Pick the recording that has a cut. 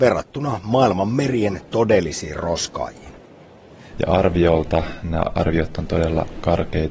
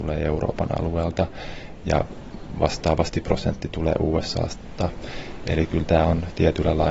first; 1 cut; at 3.9 s

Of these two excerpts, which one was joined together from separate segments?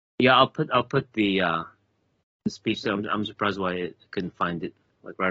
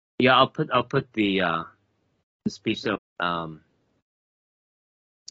second; 1 cut; at 3.0 s

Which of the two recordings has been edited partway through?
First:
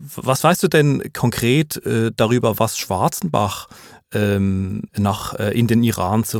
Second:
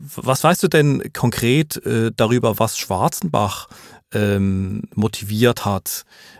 first; 1 cut; at 4.9 s

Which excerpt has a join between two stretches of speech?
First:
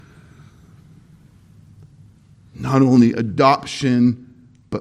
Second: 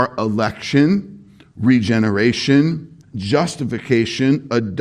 second; 1 cut; at 3.0 s

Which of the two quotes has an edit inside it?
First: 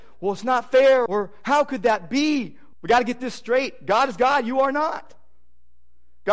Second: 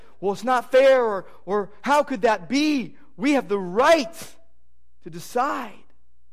first; 2 cuts; at 1.1 s, 2.7 s

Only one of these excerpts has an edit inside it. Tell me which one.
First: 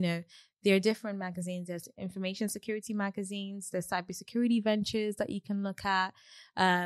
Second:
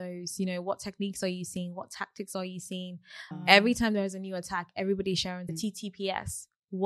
second; 2 cuts; at 3.3 s, 5.5 s

